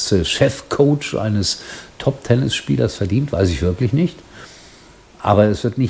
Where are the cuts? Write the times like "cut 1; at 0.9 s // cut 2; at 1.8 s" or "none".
none

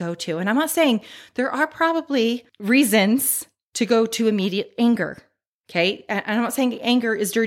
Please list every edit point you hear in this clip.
none

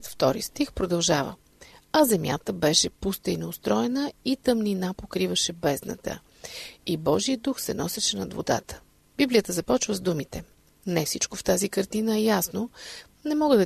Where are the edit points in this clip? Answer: cut 1; at 9.2 s // cut 2; at 10.7 s

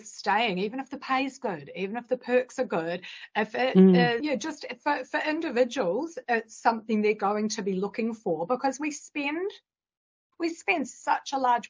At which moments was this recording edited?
cut 1; at 4.2 s // cut 2; at 10.3 s

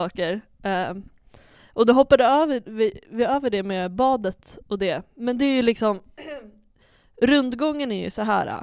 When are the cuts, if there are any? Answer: none

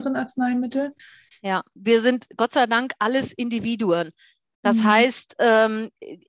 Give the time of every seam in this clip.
none

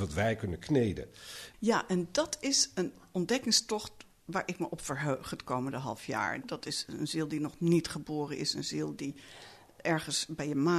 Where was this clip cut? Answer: cut 1; at 1.5 s // cut 2; at 6.4 s

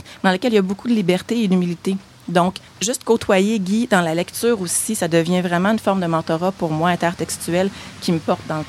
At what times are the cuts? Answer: cut 1; at 2.7 s

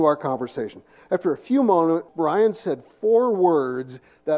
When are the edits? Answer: cut 1; at 2.1 s

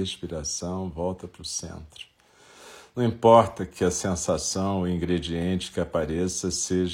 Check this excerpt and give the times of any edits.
none

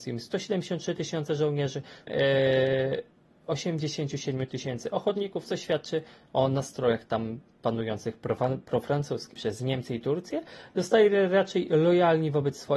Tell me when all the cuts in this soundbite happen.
cut 1; at 2.1 s // cut 2; at 9.4 s

